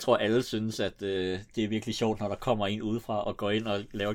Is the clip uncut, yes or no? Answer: no